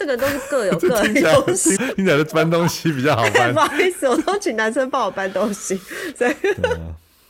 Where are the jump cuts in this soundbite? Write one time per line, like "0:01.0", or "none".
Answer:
0:01.8